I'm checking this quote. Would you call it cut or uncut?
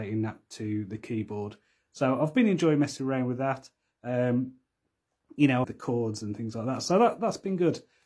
cut